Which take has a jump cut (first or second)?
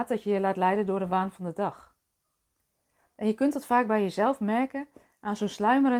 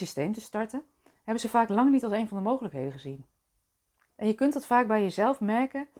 second